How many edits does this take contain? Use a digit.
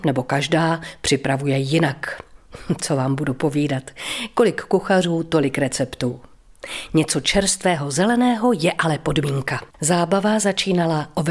1